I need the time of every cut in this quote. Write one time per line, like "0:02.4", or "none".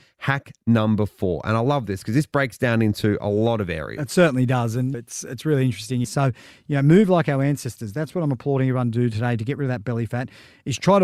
0:04.9
0:06.0